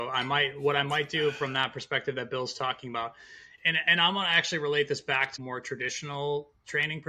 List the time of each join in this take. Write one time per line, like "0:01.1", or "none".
0:03.6
0:05.4